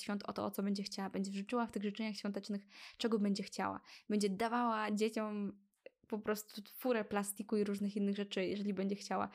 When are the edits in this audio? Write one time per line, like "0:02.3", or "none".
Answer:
none